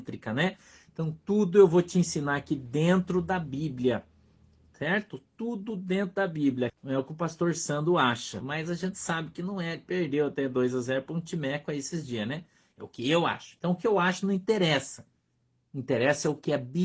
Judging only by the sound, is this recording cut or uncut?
cut